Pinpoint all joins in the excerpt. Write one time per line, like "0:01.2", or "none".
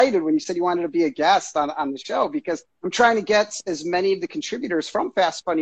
0:02.7